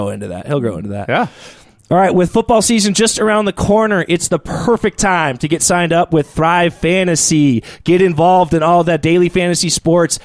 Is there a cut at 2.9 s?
no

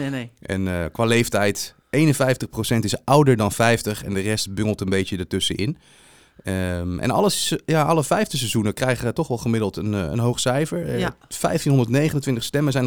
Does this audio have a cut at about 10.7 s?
no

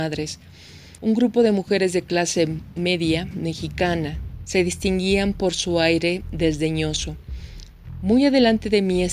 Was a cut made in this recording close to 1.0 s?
yes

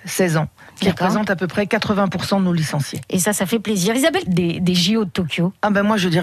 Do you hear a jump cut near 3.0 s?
no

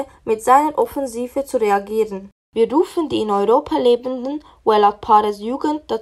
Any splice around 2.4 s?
yes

